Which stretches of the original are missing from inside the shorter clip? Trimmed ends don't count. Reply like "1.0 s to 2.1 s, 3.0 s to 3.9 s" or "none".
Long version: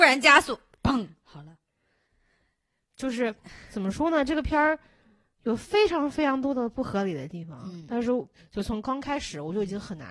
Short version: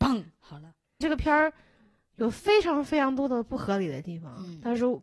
1.8 s to 4.3 s